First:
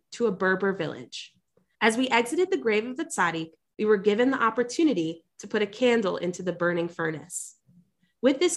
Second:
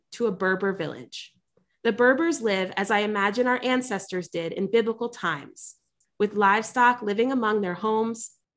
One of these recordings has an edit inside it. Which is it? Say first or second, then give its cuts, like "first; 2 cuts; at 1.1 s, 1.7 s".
first; 1 cut; at 1.8 s